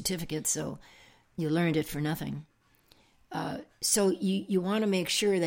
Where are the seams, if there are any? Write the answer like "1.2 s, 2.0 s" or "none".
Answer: none